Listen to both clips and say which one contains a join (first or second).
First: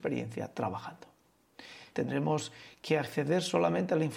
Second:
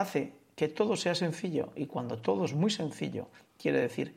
first